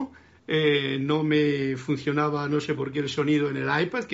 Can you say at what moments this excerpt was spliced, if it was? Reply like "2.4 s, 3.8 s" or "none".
none